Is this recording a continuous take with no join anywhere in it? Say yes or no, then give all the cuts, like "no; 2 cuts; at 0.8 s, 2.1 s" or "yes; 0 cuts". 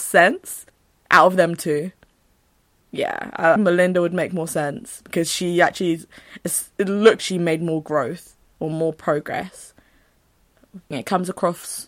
no; 3 cuts; at 3.6 s, 7.2 s, 10.9 s